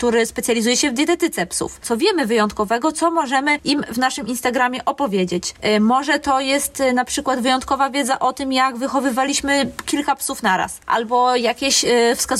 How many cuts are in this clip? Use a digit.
1